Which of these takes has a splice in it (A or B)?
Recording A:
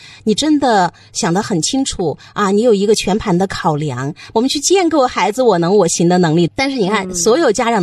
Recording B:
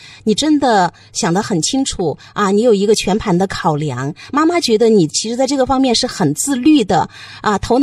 A